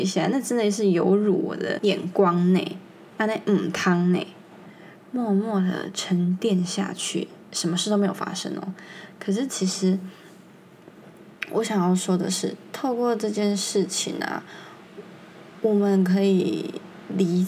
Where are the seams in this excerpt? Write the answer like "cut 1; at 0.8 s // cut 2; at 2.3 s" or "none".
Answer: cut 1; at 5.0 s